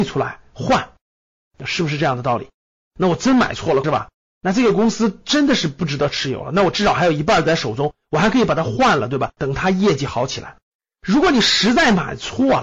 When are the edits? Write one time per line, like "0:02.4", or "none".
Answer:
0:03.8
0:09.4

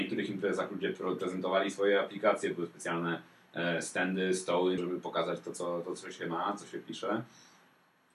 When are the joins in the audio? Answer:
0:04.8

